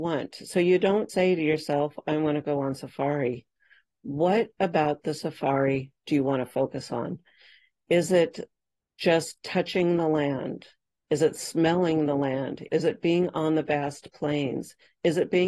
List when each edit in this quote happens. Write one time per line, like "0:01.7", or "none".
0:01.1
0:12.7